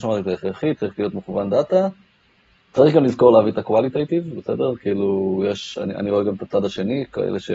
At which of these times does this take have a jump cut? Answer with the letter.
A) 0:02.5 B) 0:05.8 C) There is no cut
C